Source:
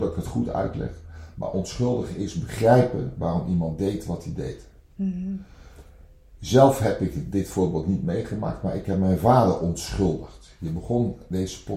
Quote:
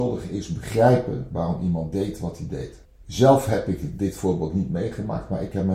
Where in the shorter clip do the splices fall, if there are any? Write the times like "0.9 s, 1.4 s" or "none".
2.8 s